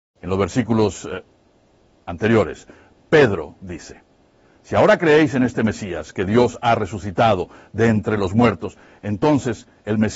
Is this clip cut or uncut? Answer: uncut